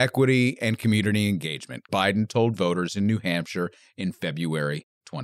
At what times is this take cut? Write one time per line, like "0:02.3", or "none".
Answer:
0:01.9